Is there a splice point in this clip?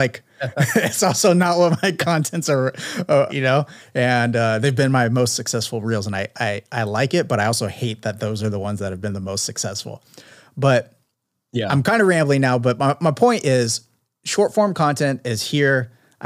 yes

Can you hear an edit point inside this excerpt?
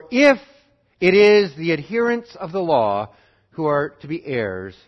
no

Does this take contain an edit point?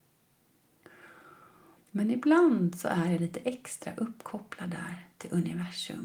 yes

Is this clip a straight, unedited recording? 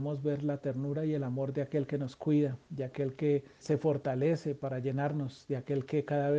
no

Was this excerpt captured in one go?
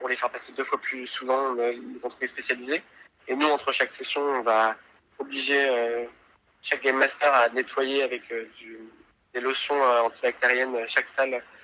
yes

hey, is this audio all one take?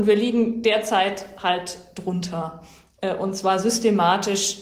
yes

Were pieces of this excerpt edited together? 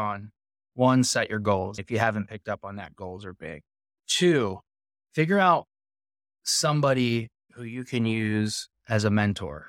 no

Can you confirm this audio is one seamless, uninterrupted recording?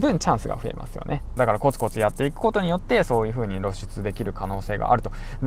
no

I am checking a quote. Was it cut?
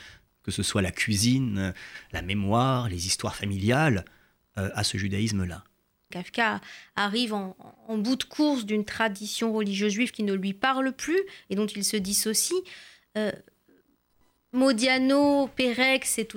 yes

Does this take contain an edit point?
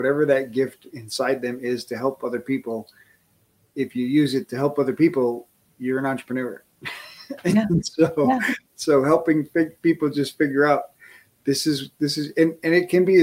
no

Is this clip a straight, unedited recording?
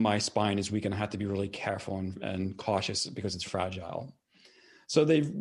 no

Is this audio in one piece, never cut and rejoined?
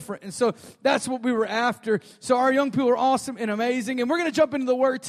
yes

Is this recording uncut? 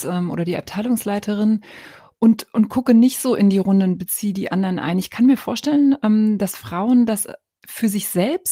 yes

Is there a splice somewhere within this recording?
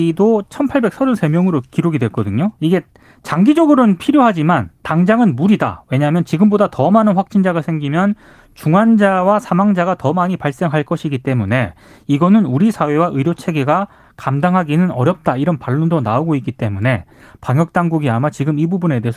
yes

